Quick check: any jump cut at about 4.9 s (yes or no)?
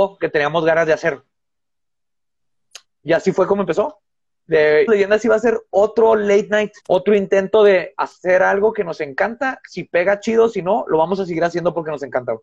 yes